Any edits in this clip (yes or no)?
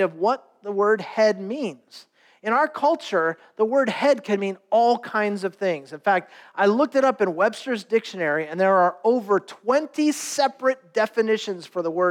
no